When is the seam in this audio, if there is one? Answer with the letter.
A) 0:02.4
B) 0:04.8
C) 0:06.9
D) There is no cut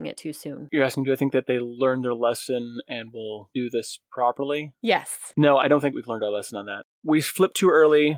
D